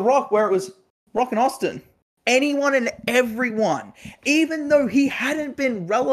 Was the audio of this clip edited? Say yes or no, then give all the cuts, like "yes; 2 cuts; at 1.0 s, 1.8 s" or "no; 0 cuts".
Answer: no; 0 cuts